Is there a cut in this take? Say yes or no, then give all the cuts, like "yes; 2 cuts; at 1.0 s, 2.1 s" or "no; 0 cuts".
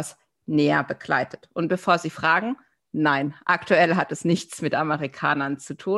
no; 0 cuts